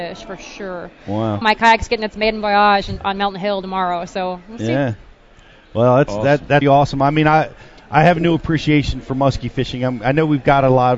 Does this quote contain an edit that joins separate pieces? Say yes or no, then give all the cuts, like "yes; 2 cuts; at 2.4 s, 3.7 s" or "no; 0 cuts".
yes; 2 cuts; at 1.4 s, 6.6 s